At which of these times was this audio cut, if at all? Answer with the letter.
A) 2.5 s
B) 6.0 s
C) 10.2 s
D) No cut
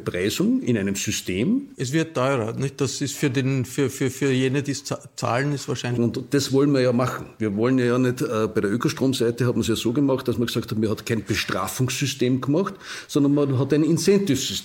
B